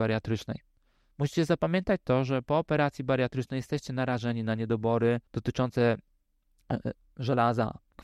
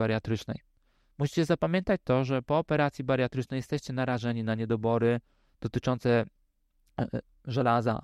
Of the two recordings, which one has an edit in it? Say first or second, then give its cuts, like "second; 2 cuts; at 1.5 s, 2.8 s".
first; 1 cut; at 5.3 s